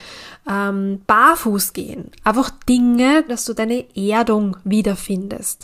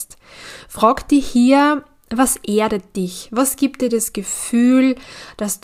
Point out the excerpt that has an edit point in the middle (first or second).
first